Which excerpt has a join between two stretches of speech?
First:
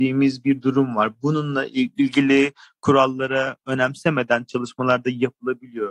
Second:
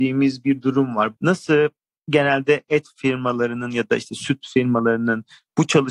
second; 1 cut; at 1.2 s

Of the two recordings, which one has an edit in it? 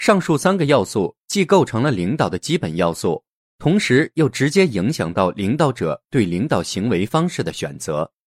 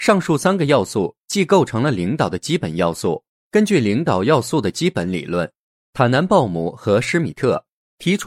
second; 1 cut; at 3.3 s

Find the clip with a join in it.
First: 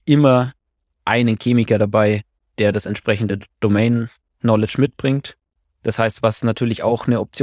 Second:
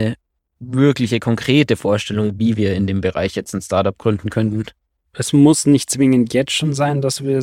second; 1 cut; at 5.0 s

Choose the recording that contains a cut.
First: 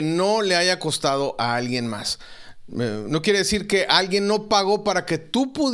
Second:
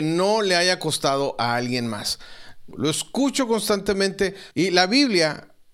second; 2 cuts; at 2.7 s, 4.5 s

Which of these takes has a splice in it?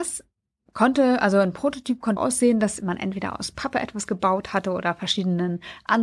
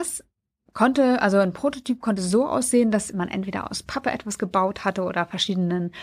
first; 1 cut; at 2.2 s

